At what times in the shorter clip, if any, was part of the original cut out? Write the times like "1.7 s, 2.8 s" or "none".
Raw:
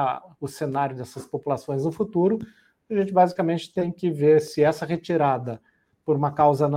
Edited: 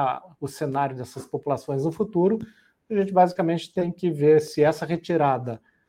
none